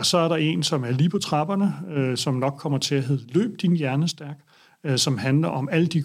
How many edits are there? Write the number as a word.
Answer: zero